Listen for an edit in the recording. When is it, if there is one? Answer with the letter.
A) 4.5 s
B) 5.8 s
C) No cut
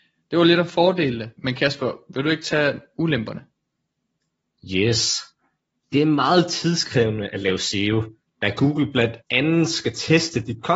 C